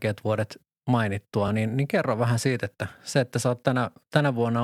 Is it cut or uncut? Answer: uncut